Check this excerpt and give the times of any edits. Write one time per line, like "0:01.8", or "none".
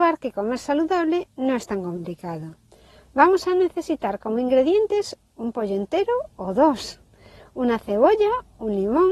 none

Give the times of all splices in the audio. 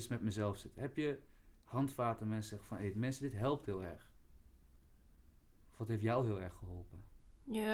none

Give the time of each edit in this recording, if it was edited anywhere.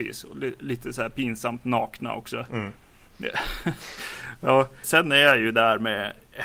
0:04.8

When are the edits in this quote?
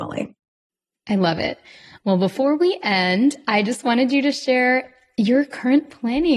none

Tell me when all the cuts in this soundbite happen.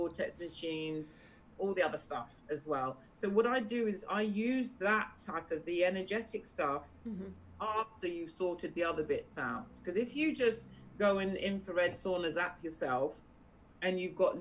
none

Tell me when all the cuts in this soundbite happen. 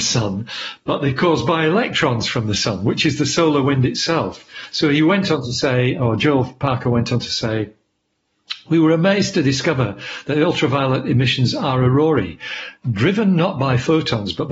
none

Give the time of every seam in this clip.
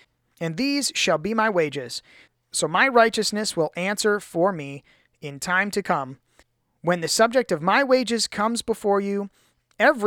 none

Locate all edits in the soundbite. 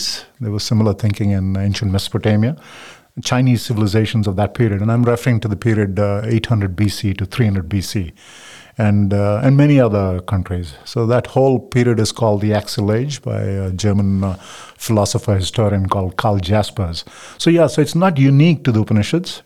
none

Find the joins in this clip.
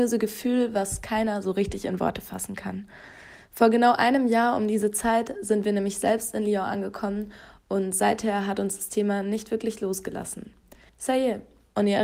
0:10.9

